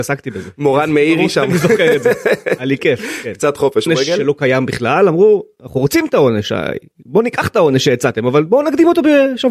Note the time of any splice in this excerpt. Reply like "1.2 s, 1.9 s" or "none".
3.9 s